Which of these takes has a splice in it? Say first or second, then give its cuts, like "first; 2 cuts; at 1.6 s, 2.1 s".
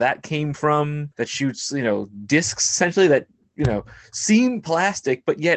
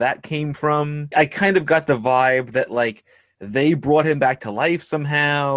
second; 2 cuts; at 1.1 s, 3.3 s